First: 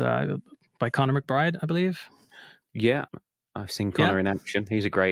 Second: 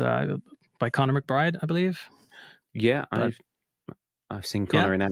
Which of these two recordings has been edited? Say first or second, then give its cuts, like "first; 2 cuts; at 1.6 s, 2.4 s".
first; 1 cut; at 3.1 s